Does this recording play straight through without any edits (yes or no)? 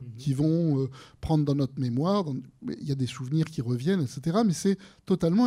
yes